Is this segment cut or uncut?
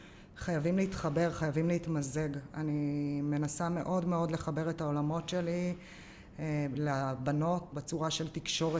cut